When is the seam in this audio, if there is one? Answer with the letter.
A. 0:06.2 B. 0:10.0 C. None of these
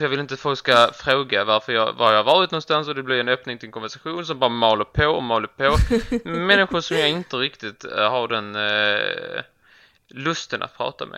C